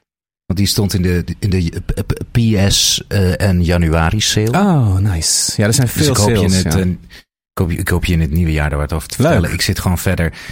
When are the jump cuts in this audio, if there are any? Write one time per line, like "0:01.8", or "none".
none